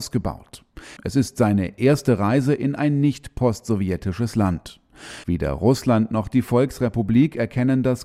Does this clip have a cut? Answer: yes; 2 cuts; at 1.0 s, 5.2 s

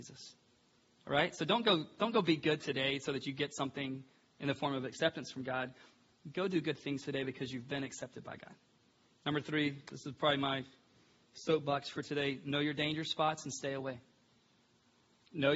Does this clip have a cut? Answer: no; 0 cuts

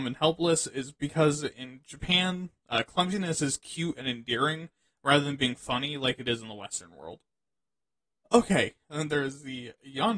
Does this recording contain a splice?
yes; 1 cut; at 8.3 s

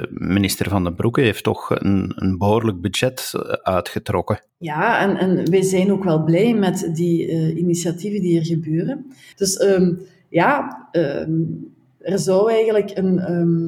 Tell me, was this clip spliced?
yes; 2 cuts; at 4.5 s, 9.3 s

